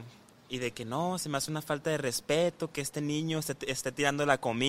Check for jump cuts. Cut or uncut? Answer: uncut